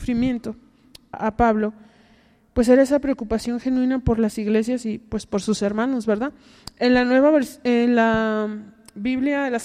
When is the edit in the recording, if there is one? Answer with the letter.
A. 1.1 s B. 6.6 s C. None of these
A